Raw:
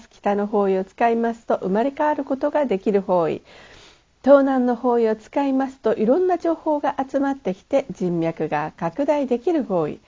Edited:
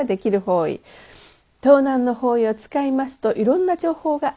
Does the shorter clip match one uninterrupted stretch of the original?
yes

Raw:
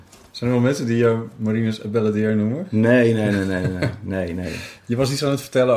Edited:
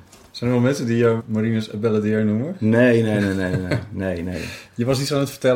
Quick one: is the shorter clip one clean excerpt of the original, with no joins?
no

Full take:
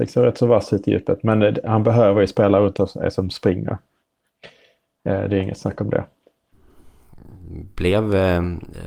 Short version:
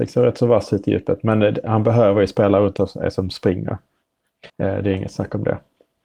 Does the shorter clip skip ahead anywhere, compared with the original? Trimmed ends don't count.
yes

